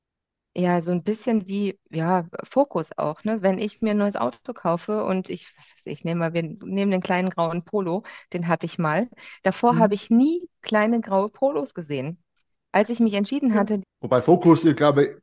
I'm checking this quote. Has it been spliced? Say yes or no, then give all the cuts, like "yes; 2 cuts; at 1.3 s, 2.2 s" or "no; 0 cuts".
yes; 1 cut; at 13.8 s